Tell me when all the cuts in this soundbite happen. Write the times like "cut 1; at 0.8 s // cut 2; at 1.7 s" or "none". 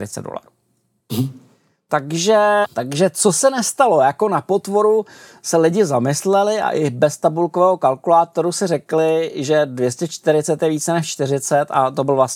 cut 1; at 2.6 s